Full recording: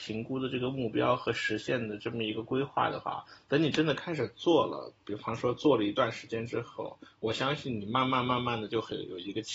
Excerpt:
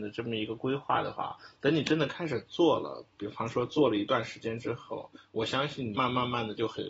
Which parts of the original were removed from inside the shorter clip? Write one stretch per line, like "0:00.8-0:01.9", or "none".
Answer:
0:07.8-0:08.1